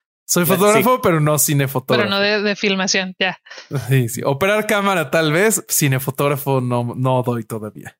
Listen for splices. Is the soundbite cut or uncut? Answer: uncut